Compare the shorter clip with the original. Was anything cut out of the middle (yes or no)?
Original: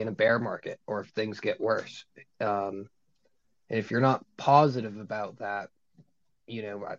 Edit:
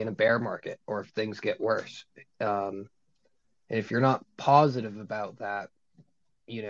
no